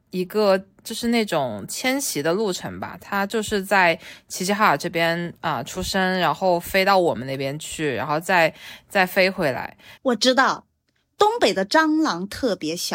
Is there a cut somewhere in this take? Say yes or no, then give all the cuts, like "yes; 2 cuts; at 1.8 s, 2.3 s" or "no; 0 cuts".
yes; 1 cut; at 10.0 s